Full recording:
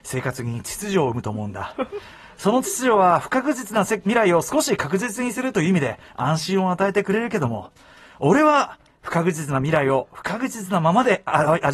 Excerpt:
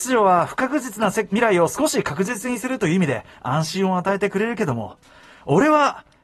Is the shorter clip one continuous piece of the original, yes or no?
yes